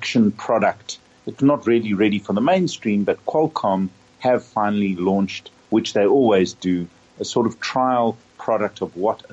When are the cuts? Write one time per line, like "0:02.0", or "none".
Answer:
none